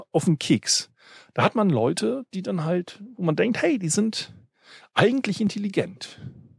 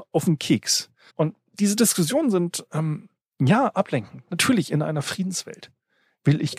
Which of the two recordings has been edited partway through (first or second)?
second